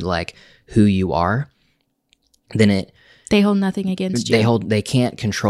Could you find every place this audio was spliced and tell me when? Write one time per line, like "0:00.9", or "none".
none